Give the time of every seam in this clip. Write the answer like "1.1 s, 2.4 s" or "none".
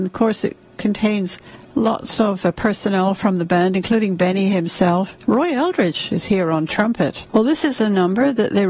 5.2 s, 7.2 s